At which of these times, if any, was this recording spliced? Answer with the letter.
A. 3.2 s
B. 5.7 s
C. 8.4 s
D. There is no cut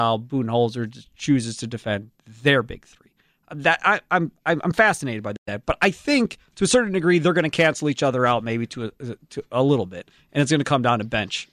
D